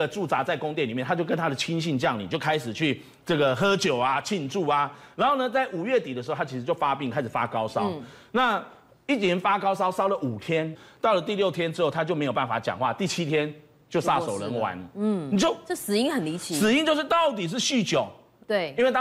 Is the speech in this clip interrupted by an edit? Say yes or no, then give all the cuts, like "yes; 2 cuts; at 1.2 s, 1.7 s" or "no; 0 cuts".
no; 0 cuts